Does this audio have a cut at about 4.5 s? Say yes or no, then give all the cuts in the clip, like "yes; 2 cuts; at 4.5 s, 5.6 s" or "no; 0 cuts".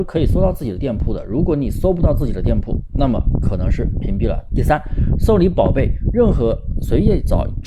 yes; 1 cut; at 4.5 s